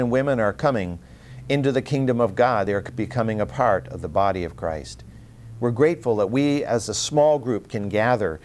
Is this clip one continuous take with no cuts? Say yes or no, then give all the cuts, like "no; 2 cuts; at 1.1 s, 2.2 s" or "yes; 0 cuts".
yes; 0 cuts